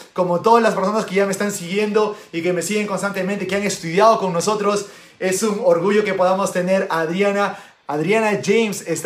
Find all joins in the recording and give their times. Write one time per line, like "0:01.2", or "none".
0:07.7